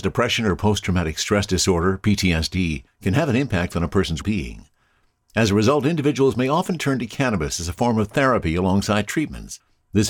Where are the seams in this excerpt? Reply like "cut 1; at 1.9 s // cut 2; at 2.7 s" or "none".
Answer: cut 1; at 4.2 s